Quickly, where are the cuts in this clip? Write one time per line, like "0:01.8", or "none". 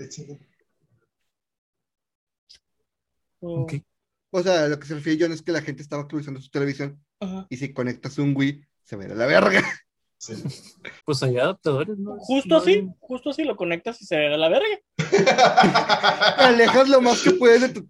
0:11.0